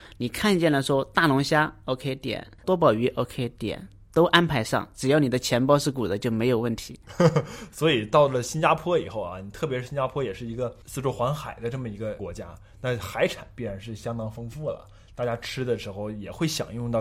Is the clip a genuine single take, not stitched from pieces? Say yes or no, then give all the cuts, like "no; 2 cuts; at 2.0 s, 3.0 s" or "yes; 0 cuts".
no; 1 cut; at 5.9 s